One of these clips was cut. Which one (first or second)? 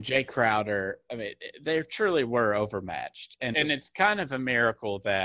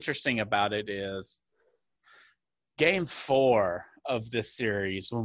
first